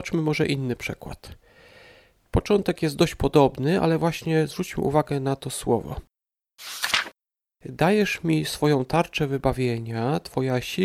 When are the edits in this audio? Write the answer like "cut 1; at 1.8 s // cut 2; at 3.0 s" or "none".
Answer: none